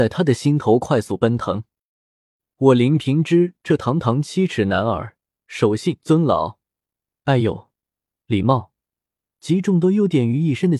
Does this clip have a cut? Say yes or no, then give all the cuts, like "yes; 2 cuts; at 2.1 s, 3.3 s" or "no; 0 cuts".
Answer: yes; 2 cuts; at 5.3 s, 8.1 s